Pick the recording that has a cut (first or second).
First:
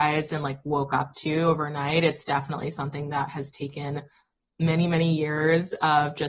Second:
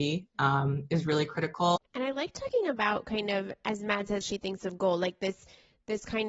second